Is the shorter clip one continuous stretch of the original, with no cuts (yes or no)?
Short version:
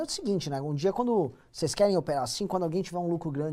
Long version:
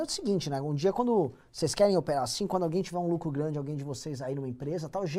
yes